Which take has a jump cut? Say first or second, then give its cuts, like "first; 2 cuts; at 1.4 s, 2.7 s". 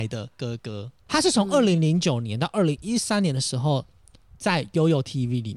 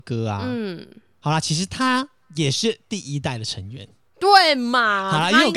first; 1 cut; at 1.1 s